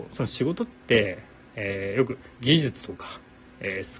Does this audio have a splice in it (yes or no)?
no